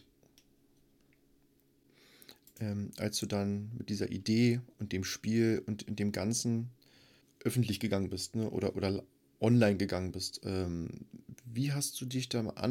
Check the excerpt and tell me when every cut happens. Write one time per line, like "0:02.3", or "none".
none